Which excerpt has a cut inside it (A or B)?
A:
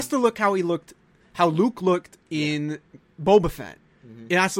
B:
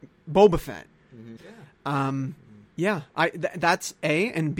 B